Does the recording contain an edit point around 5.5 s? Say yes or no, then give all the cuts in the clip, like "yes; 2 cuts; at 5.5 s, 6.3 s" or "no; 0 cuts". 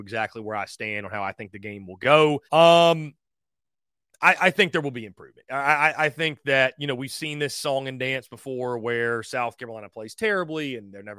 no; 1 cut; at 2.5 s